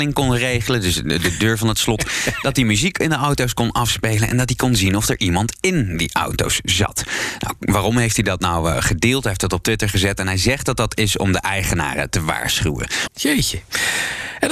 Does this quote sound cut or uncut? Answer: cut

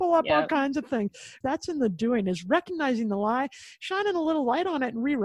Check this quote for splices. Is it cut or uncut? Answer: cut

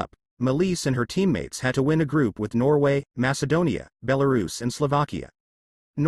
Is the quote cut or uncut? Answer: uncut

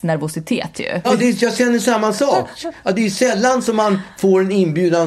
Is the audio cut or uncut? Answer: cut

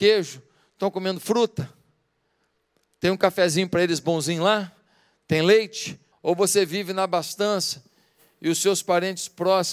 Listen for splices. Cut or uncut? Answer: cut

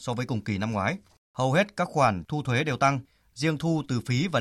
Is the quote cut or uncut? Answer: uncut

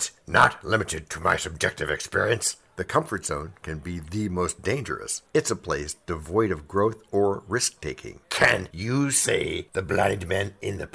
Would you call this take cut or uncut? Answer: cut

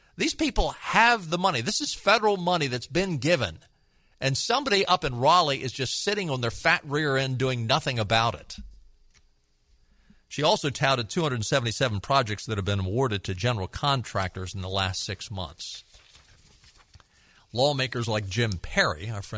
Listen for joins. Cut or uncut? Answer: uncut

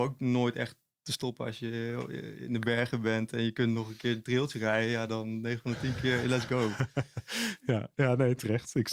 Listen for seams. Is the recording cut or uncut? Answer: uncut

